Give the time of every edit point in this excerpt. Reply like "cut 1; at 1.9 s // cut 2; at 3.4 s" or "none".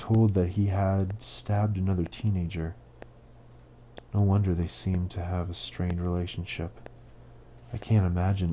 none